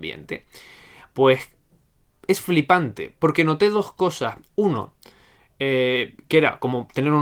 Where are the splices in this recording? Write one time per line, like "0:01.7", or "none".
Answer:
none